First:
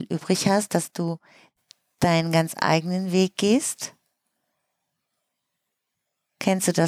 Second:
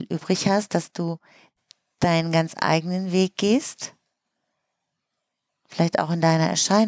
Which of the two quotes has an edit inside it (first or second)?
second